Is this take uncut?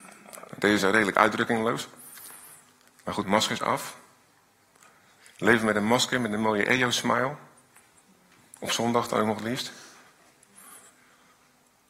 no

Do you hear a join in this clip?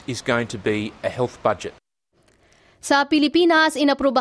no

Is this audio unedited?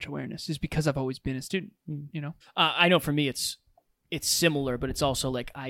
no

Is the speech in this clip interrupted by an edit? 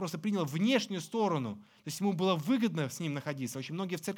no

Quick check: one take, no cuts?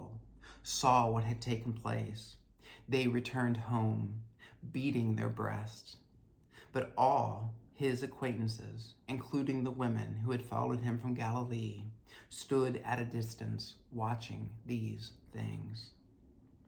yes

